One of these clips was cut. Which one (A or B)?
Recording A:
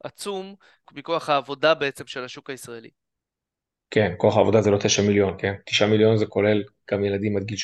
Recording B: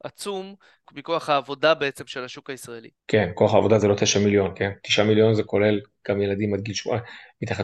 B